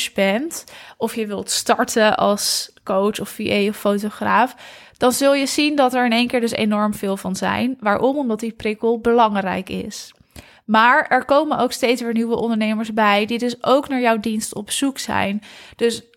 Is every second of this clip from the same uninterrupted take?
yes; 0 cuts

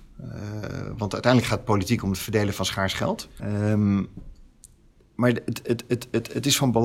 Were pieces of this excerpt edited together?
yes; 1 cut; at 3.4 s

